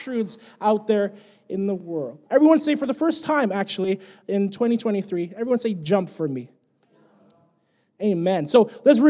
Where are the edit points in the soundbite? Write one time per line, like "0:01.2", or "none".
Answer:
0:02.3